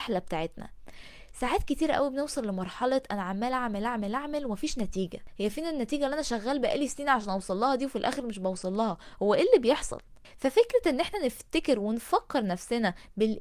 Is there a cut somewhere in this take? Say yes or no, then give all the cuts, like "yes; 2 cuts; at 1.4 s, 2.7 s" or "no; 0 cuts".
no; 0 cuts